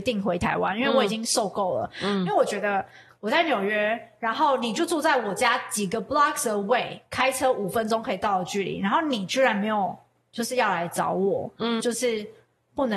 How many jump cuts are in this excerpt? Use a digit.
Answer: 1